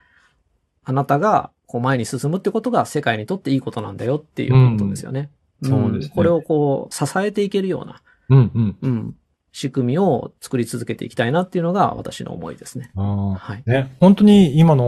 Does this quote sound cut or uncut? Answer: uncut